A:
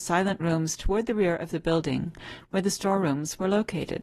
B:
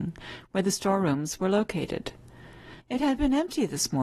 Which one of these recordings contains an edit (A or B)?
B